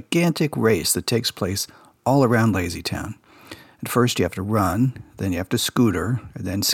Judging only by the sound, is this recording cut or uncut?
uncut